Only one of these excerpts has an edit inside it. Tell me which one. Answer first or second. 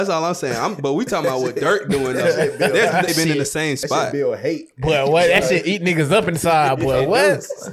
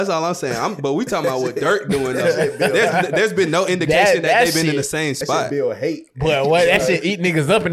first